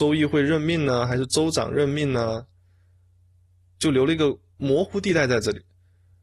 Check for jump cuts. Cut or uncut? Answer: uncut